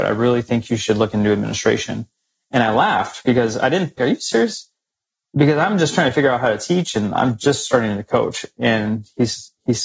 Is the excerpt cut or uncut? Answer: cut